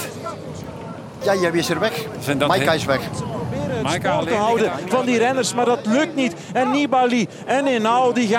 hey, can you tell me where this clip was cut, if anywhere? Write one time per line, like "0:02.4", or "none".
0:01.2